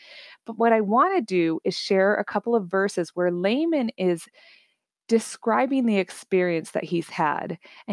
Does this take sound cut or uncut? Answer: uncut